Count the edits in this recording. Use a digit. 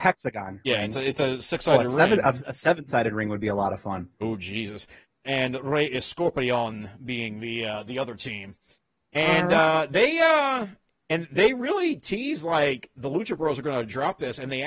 1